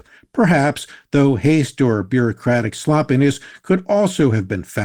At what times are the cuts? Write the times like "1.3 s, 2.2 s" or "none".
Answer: none